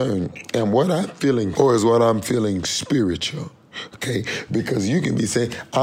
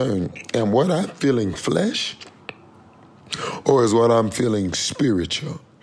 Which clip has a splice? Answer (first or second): first